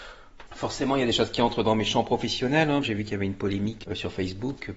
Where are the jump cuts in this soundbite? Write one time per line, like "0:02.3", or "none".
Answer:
0:02.8
0:03.8